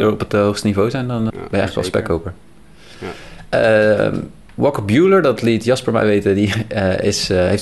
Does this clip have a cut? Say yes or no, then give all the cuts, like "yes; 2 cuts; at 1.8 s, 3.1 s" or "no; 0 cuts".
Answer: yes; 1 cut; at 1.3 s